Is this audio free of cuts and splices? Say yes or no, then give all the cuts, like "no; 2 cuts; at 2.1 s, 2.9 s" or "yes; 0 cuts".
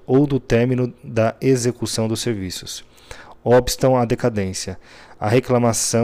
yes; 0 cuts